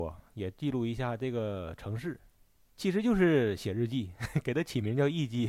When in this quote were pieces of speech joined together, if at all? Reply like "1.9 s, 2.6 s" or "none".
none